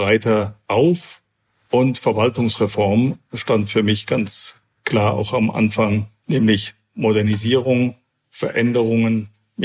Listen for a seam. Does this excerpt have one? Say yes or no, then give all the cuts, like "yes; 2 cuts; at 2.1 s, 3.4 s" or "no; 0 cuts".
no; 0 cuts